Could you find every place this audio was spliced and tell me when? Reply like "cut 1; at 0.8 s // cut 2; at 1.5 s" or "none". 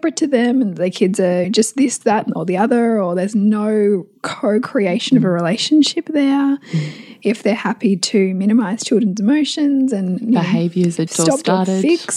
cut 1; at 1.4 s // cut 2; at 11.1 s

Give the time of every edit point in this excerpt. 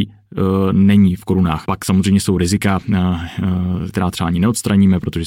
cut 1; at 1.6 s // cut 2; at 3.9 s

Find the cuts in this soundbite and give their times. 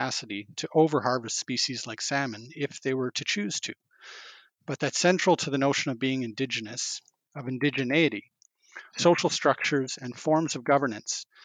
cut 1; at 8.9 s

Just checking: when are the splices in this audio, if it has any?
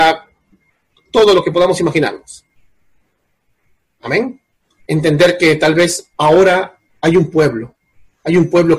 cut 1; at 4.8 s // cut 2; at 6.1 s

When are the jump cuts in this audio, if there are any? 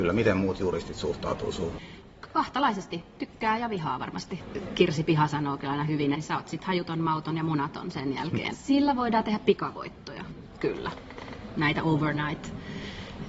cut 1; at 6.1 s // cut 2; at 8.5 s

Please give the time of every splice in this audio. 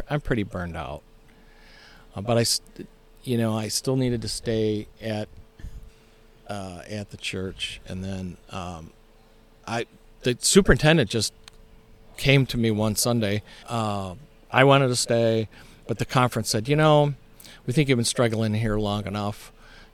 cut 1; at 13.6 s

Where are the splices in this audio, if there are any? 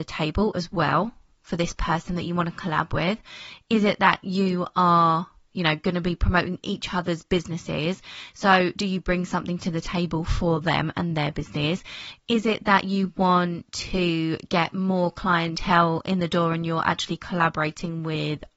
none

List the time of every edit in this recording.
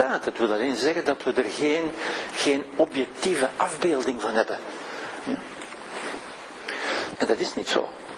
cut 1; at 5.2 s // cut 2; at 7.1 s

